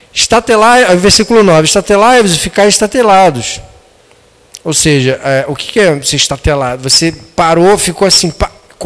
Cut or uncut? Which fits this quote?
uncut